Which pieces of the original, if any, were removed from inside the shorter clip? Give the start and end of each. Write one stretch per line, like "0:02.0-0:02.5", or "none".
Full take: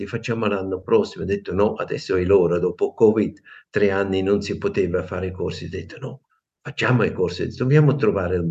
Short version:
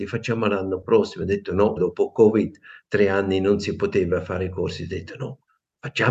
0:01.8-0:02.6